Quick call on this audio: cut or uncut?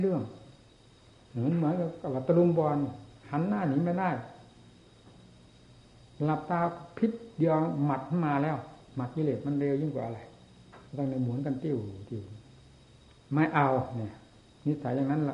cut